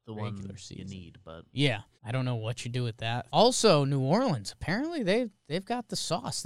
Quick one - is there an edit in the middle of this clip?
yes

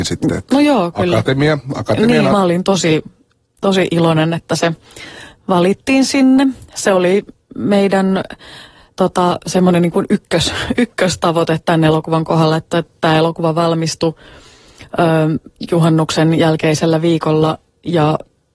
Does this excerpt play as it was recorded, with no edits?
no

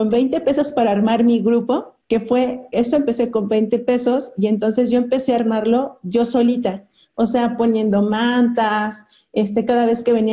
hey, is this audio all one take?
no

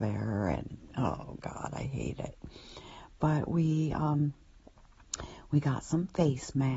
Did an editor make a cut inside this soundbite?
no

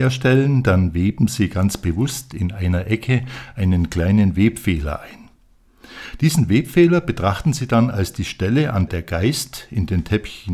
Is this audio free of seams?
no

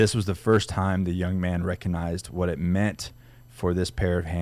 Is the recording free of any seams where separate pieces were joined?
yes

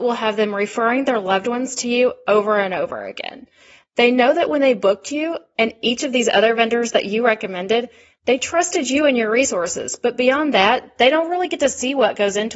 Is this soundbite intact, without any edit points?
yes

